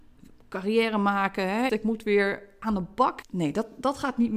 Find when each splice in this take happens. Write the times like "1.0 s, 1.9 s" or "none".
1.7 s, 3.2 s